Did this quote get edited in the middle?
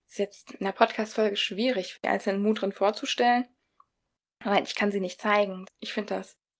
yes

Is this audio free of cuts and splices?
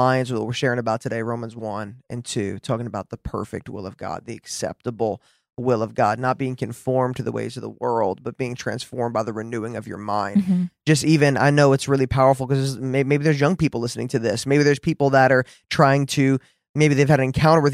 yes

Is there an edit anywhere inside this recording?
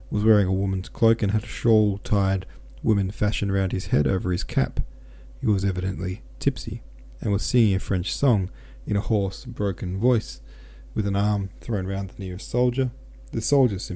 no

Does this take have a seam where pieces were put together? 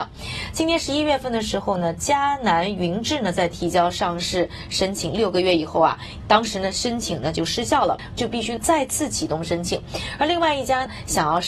yes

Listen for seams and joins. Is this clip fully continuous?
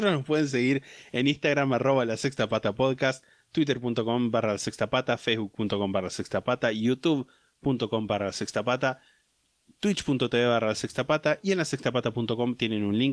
yes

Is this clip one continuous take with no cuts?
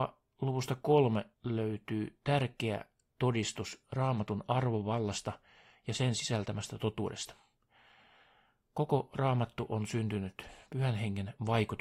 no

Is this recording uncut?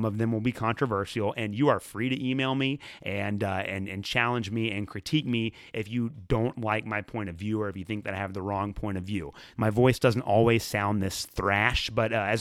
no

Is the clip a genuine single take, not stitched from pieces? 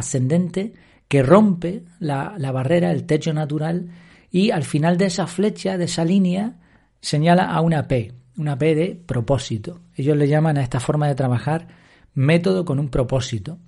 yes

